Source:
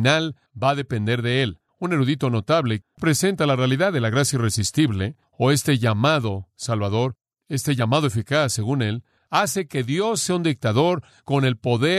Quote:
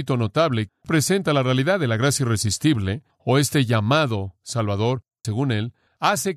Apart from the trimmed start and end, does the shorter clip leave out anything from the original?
yes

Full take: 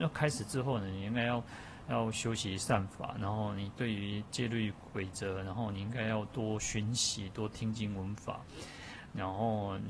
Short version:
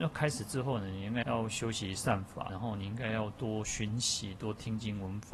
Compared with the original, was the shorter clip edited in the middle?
yes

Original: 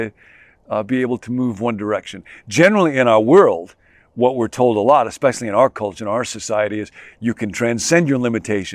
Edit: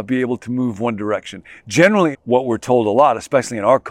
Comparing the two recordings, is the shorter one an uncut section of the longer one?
no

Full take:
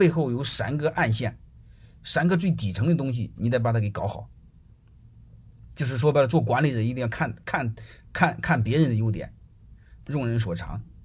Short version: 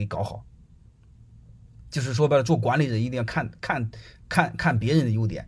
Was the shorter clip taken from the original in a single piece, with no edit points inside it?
yes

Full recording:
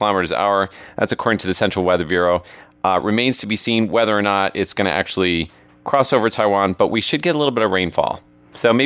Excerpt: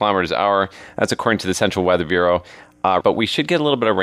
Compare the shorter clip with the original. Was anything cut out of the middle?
yes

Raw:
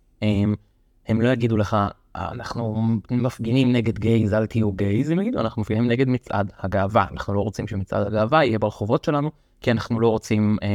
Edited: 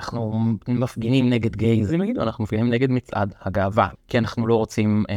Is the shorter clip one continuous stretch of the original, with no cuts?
no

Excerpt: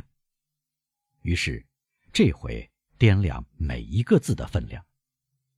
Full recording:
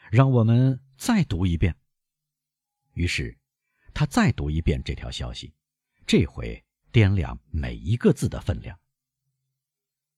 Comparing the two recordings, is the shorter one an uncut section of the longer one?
no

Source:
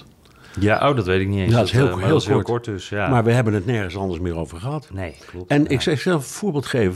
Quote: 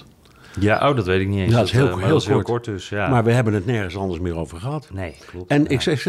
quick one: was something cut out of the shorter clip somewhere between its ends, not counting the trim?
no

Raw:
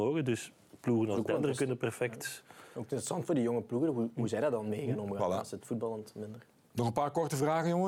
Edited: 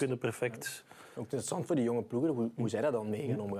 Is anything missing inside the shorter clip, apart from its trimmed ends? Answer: no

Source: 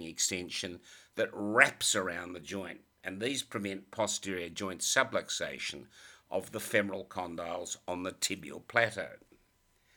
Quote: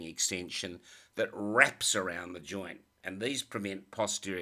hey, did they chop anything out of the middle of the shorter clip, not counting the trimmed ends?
no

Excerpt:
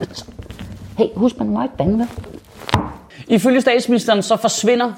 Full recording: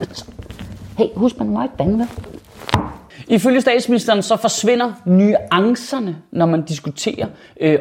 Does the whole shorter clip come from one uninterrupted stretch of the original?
yes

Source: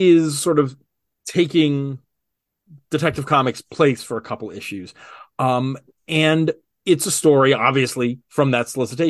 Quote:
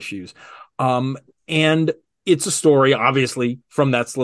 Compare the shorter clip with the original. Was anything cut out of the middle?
no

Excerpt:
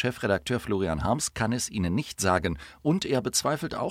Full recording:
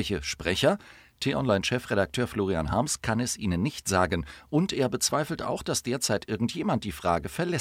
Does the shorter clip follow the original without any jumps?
yes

